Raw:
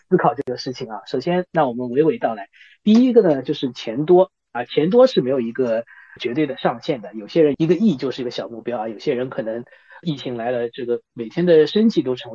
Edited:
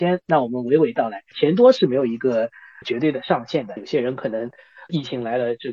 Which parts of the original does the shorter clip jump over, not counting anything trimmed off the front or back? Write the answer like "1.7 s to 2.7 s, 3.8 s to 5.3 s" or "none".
2.6 s to 4.7 s, 7.1 s to 8.9 s